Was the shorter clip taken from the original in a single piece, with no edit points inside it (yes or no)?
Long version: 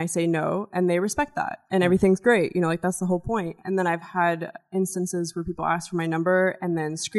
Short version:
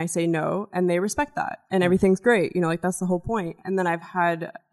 yes